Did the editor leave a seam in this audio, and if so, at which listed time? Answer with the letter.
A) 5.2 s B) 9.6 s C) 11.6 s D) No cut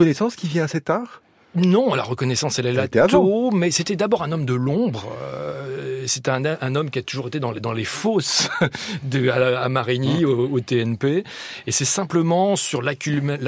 D